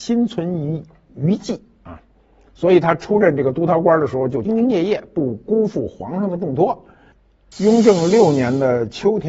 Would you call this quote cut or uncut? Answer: cut